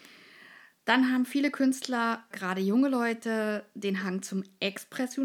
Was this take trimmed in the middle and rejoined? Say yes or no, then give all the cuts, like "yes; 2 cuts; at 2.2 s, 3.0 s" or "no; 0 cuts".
yes; 1 cut; at 2.3 s